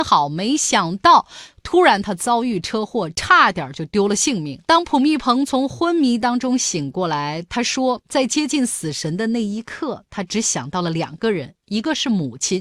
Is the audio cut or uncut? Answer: cut